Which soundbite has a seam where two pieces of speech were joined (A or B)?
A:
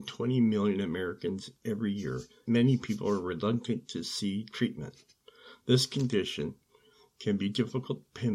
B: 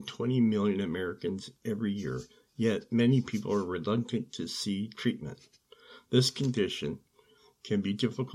A